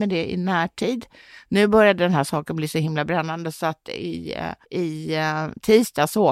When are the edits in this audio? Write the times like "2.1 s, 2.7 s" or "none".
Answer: 4.6 s